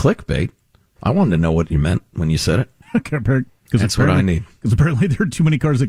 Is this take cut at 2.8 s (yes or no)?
yes